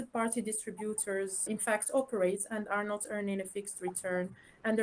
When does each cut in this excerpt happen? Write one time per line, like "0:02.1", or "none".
0:01.5